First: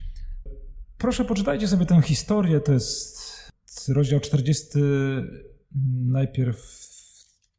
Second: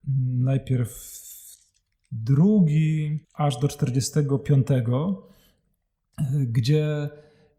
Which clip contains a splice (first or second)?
second